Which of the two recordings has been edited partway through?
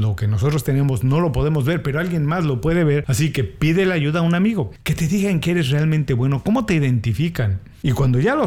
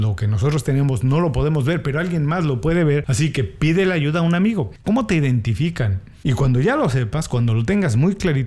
second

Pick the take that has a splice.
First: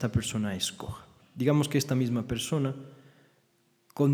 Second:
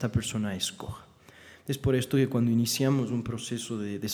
first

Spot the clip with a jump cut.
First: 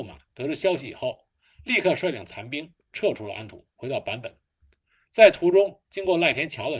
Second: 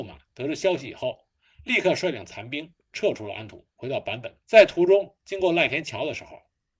second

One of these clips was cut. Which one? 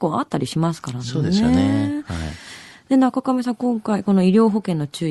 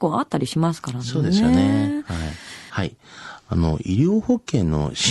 second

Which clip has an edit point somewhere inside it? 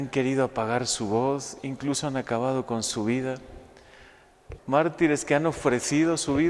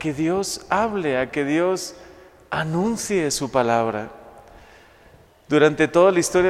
first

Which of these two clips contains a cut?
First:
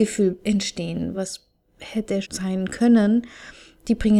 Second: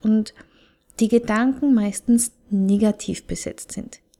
first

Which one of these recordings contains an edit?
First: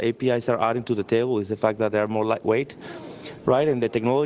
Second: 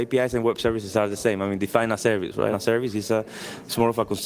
second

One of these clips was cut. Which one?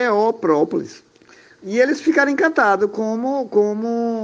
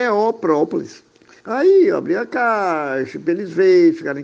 second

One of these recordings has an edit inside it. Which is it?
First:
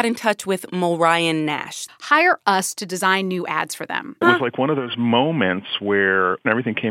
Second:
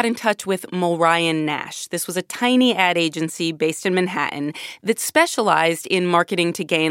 first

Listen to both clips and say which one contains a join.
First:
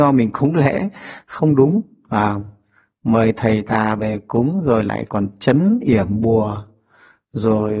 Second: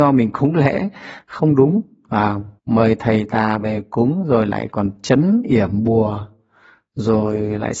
second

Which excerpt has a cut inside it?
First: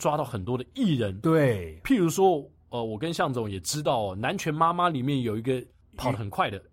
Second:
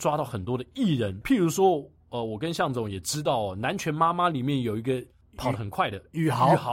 second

